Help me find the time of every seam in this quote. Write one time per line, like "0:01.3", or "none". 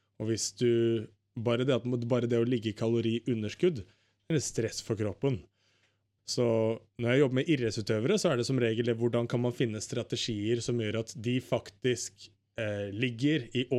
0:06.2